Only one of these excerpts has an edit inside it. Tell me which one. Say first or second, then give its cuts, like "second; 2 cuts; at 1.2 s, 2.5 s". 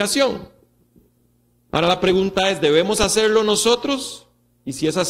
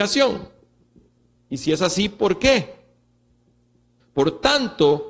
second; 2 cuts; at 1.4 s, 4.0 s